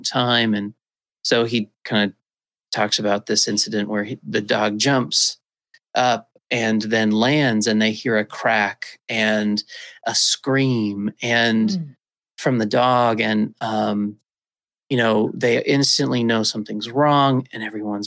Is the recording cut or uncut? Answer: uncut